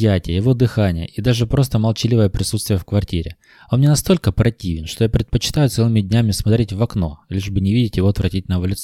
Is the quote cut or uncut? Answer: uncut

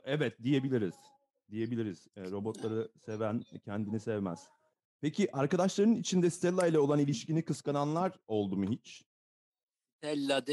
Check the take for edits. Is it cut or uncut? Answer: uncut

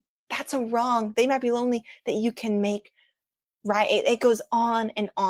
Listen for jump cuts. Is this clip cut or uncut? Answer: uncut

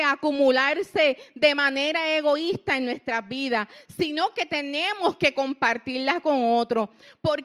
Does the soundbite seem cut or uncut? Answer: uncut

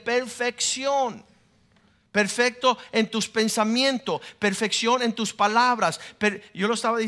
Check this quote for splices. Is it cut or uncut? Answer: uncut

